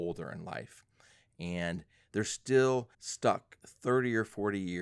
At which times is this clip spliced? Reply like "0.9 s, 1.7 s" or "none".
2.9 s